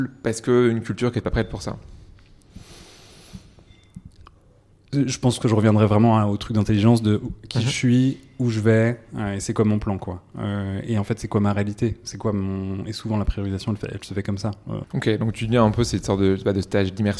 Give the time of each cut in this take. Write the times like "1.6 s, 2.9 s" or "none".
14.8 s